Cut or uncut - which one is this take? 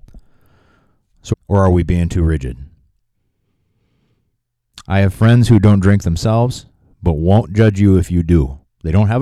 cut